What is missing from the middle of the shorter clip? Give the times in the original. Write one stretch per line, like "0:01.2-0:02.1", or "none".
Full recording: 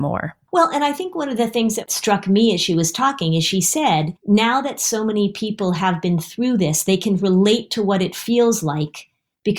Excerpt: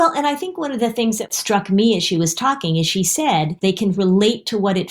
0:04.2-0:06.9